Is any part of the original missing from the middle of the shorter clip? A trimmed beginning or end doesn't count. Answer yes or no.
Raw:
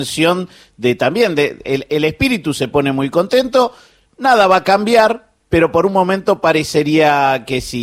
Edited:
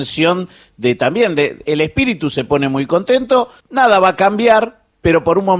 yes